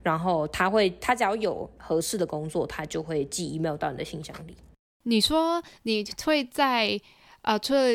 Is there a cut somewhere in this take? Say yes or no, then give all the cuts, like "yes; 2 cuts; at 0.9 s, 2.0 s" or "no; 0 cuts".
no; 0 cuts